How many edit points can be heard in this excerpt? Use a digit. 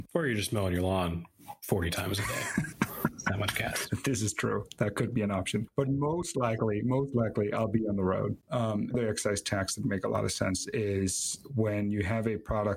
1